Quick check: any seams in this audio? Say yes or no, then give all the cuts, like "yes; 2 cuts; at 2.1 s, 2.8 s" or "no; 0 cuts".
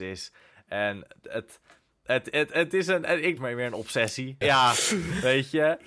yes; 2 cuts; at 3.4 s, 4.4 s